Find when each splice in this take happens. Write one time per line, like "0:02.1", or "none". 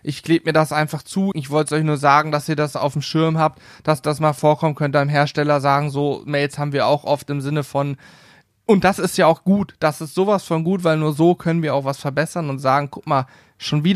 0:01.3